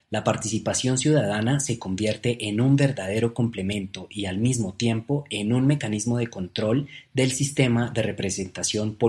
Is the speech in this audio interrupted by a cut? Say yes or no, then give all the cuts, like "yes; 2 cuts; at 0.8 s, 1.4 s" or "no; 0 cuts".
no; 0 cuts